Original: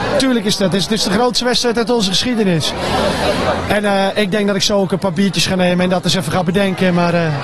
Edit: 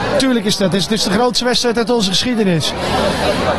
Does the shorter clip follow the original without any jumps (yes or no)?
yes